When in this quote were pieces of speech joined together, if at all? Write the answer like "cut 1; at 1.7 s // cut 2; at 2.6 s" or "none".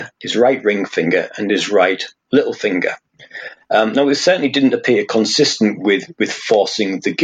none